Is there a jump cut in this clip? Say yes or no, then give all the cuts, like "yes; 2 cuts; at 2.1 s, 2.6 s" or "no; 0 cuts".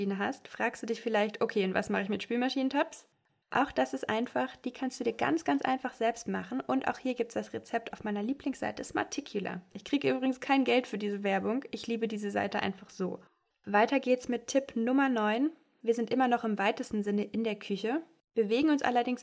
no; 0 cuts